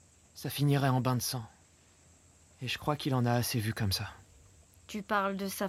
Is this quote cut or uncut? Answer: uncut